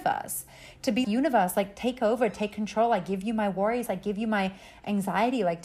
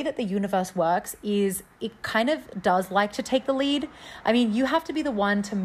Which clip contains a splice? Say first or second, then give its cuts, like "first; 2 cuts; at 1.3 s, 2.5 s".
first; 2 cuts; at 1.0 s, 3.9 s